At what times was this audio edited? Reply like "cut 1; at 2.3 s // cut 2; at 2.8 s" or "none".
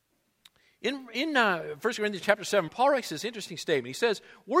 cut 1; at 2.7 s